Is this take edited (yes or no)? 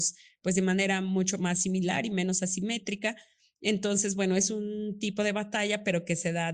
no